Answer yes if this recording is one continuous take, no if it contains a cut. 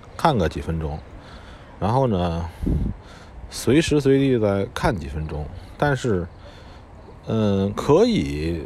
yes